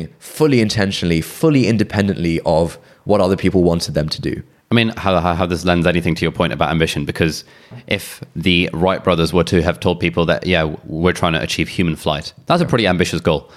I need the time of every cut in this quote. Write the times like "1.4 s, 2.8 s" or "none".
4.9 s